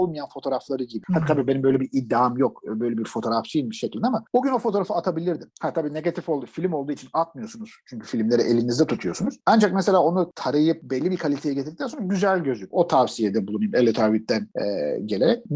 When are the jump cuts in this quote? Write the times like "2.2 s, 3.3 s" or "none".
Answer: none